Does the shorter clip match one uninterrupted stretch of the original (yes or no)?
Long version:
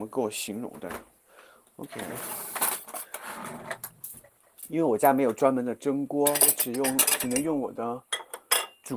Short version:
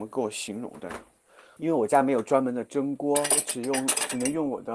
no